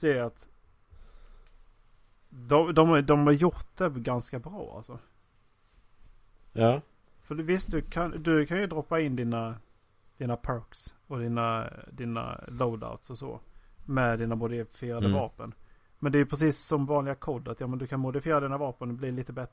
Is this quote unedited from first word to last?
yes; 0 cuts

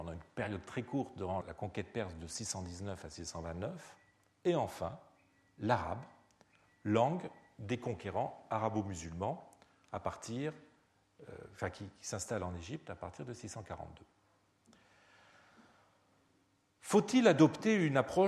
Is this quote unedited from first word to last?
no; 1 cut; at 1.4 s

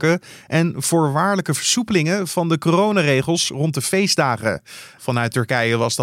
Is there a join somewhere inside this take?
yes; 1 cut; at 5.0 s

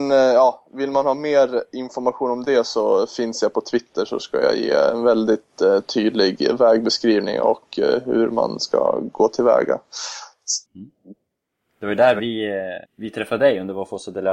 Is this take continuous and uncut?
no; 2 cuts; at 10.7 s, 12.9 s

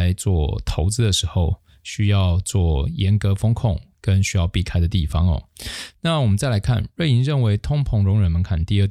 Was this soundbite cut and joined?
no; 0 cuts

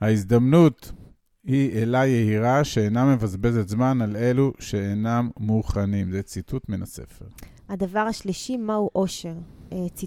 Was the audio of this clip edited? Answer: no; 0 cuts

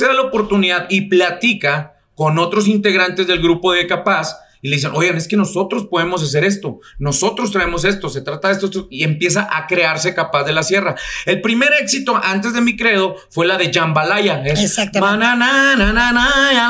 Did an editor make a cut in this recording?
no; 0 cuts

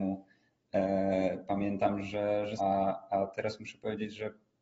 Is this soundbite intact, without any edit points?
no; 1 cut; at 2.6 s

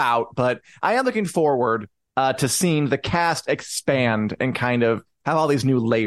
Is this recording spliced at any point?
yes; 1 cut; at 2.0 s

